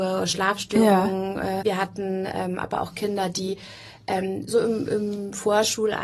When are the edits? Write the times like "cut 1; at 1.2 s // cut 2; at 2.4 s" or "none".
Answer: cut 1; at 1.6 s